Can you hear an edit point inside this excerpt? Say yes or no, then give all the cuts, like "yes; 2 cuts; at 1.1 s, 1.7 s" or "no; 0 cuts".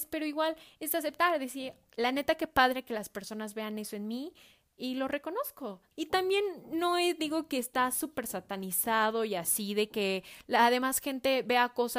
yes; 1 cut; at 5.9 s